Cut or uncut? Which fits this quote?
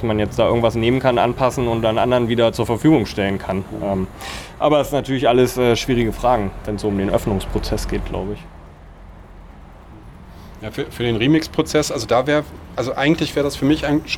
uncut